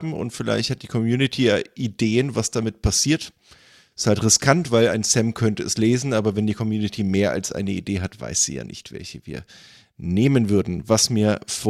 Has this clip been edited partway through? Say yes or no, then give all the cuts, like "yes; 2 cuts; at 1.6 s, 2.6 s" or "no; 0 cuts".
no; 0 cuts